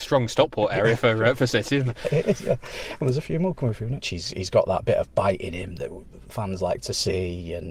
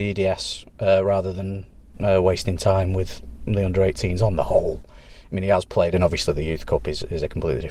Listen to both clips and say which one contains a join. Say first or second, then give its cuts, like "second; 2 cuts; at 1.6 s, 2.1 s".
first; 1 cut; at 4.0 s